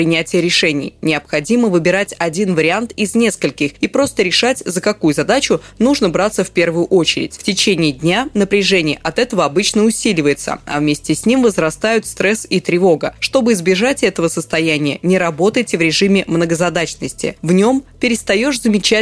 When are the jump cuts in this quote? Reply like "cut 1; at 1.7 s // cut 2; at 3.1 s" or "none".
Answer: none